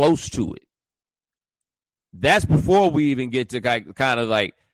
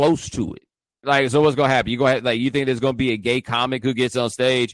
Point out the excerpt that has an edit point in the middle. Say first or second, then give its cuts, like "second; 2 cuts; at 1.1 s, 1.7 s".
second; 1 cut; at 1.0 s